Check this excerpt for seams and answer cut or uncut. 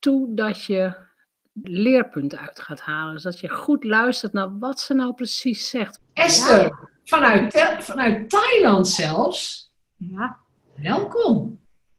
cut